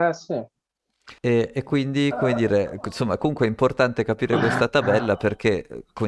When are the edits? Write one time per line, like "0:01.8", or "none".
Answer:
0:01.2